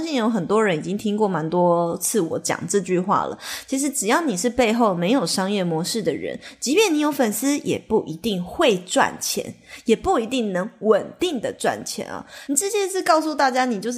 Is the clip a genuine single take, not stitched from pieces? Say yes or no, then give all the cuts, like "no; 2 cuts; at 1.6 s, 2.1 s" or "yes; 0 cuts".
no; 1 cut; at 12.5 s